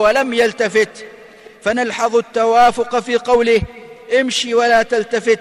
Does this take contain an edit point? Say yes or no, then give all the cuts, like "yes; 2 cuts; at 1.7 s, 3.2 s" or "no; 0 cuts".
no; 0 cuts